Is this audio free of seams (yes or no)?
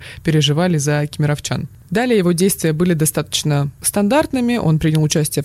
yes